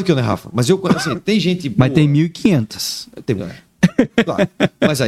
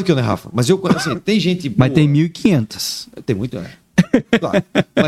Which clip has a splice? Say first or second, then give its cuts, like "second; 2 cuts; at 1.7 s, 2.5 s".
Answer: first; 1 cut; at 3.4 s